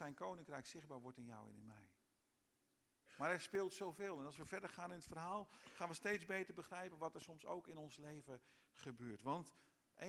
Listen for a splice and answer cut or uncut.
uncut